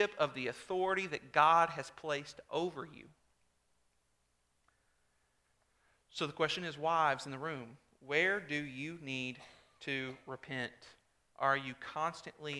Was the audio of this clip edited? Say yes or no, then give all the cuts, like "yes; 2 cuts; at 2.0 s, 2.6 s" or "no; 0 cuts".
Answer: no; 0 cuts